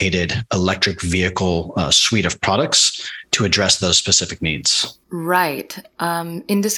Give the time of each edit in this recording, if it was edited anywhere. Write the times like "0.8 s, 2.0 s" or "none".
5.0 s